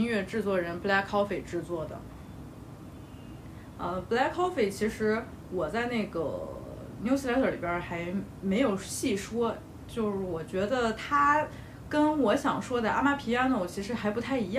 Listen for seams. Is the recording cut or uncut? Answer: cut